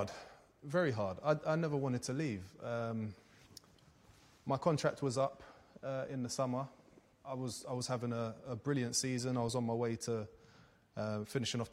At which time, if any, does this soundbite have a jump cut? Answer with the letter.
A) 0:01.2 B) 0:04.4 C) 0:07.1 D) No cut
C